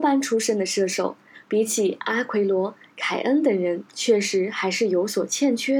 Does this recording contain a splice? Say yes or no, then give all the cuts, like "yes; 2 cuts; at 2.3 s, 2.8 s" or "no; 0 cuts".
yes; 1 cut; at 1.3 s